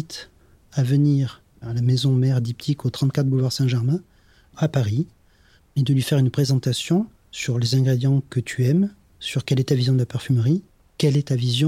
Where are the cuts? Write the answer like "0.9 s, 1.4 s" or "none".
5.6 s